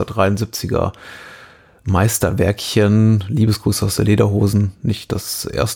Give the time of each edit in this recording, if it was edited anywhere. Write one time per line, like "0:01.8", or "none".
none